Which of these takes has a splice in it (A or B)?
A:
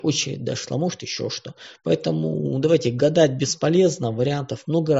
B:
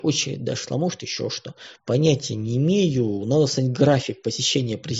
B